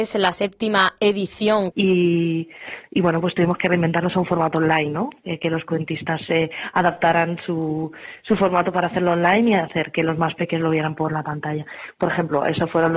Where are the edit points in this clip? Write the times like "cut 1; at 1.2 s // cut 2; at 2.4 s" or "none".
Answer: cut 1; at 1.7 s